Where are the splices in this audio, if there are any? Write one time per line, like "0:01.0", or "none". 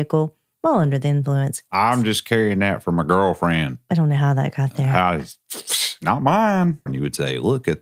0:01.7
0:06.9